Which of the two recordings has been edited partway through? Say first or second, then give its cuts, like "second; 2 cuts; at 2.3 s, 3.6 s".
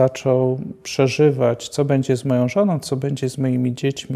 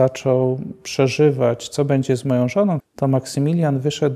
second; 1 cut; at 2.8 s